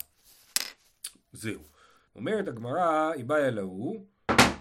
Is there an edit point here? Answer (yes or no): yes